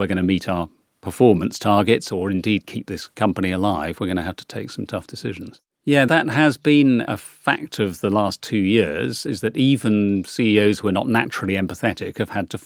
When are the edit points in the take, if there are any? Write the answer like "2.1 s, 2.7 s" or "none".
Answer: 5.7 s